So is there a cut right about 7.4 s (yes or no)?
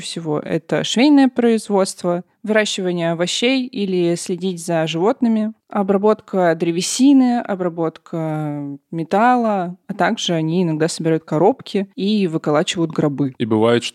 no